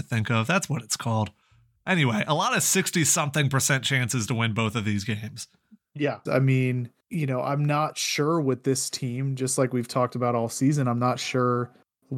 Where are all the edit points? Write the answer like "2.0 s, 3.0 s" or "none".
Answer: 6.3 s